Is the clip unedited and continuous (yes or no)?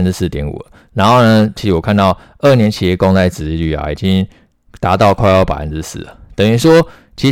no